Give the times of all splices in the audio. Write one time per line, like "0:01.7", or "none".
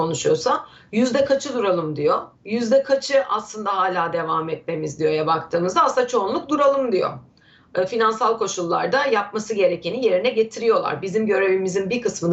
0:02.3